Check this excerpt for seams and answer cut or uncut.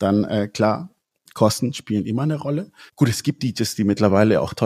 uncut